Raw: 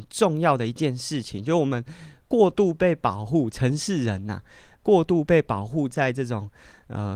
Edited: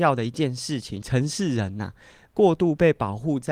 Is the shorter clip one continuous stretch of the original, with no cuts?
no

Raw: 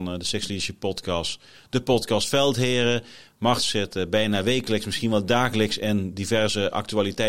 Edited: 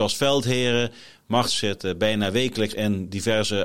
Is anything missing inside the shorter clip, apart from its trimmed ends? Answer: yes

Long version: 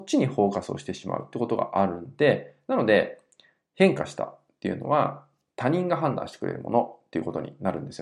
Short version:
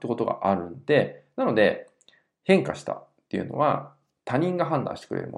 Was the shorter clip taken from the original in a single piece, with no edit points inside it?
yes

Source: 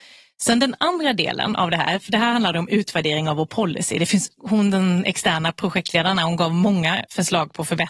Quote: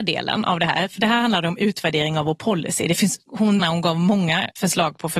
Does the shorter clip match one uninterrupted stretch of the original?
no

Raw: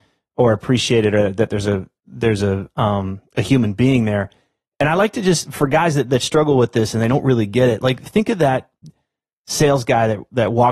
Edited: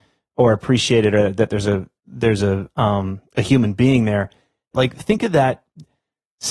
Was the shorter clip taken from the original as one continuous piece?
no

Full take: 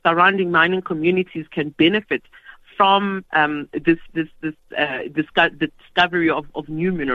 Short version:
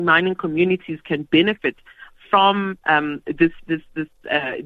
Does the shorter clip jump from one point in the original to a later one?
no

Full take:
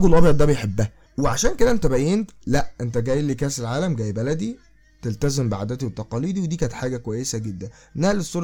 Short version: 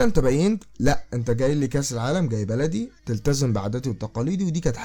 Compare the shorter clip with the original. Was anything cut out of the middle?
yes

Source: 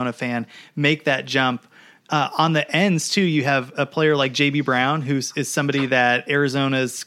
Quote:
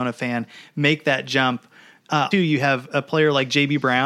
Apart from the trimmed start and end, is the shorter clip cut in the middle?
yes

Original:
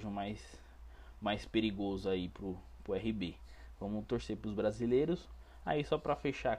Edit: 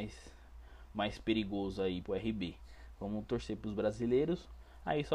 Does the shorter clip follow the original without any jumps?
no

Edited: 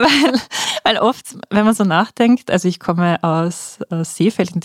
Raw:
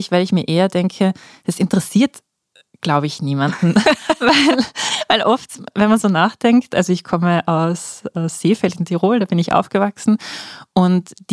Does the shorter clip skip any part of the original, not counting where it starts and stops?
no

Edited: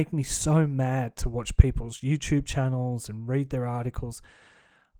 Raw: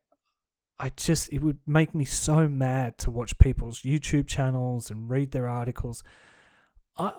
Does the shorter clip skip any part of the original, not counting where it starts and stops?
no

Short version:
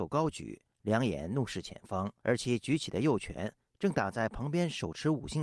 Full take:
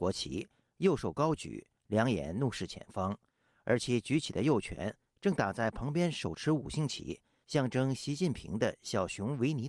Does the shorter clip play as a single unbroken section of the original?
no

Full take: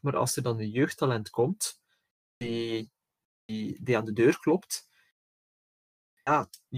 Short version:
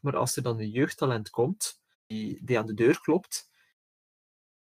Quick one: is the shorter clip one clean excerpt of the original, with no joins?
no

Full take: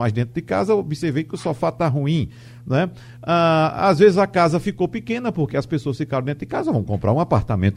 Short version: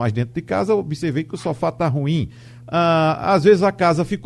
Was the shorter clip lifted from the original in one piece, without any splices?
no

